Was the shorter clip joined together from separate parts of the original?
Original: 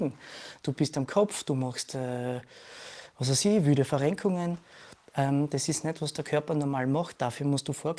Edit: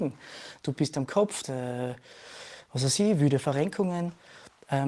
yes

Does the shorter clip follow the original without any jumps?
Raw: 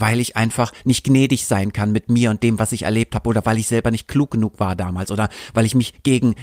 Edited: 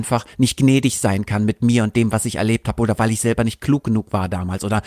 yes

